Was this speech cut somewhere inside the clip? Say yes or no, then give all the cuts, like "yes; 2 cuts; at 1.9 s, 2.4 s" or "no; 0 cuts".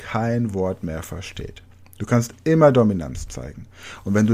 no; 0 cuts